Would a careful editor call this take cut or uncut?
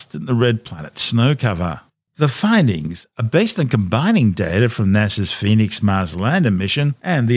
cut